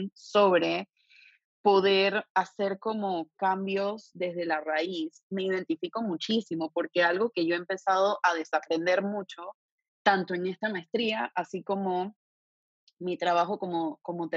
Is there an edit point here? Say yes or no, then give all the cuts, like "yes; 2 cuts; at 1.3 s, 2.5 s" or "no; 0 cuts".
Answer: no; 0 cuts